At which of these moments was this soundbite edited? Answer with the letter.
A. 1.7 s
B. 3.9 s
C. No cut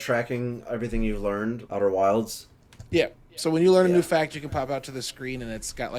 A